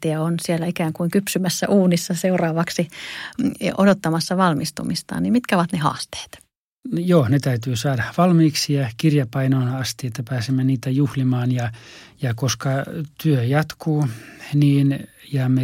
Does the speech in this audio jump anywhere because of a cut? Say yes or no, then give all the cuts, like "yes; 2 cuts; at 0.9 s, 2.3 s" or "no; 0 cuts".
no; 0 cuts